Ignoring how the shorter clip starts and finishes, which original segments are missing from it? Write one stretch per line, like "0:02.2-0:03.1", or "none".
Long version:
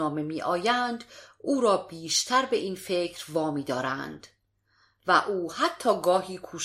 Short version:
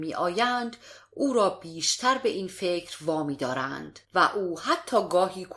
0:04.3-0:05.0

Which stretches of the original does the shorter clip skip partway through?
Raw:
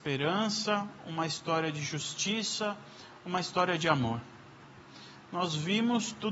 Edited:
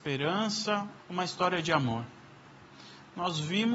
0:01.0-0:03.1

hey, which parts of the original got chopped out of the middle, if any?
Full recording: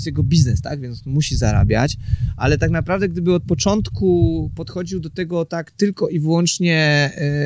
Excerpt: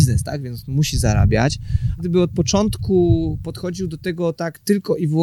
0:02.4-0:03.1

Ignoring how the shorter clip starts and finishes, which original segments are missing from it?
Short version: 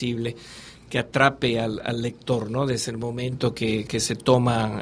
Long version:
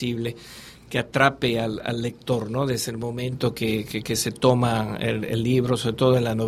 0:03.9-0:04.0

